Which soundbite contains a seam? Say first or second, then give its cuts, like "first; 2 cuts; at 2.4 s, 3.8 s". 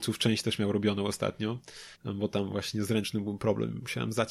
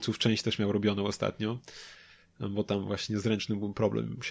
first; 1 cut; at 2.0 s